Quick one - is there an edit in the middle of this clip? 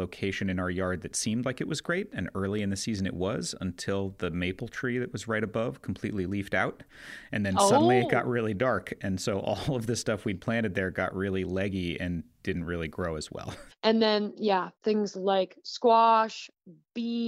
yes; 1 cut; at 13.7 s

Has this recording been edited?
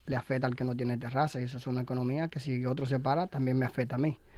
no; 0 cuts

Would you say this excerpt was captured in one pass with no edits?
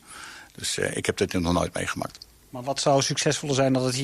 yes; 0 cuts

